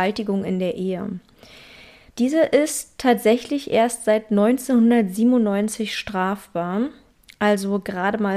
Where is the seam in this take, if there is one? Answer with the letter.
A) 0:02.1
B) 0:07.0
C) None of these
C